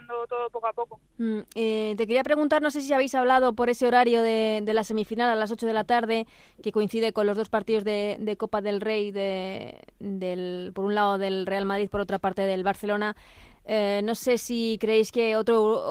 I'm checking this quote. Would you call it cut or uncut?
uncut